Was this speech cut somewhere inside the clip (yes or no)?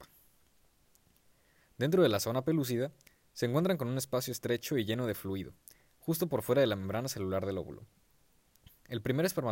no